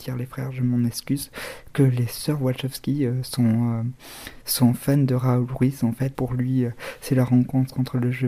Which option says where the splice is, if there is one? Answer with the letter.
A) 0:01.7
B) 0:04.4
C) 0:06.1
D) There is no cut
C